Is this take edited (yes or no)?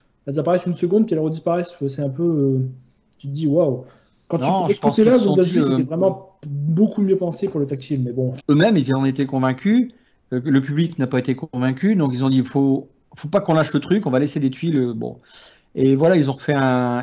yes